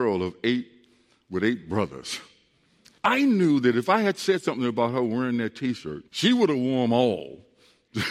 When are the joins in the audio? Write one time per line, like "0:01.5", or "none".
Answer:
0:03.0
0:06.1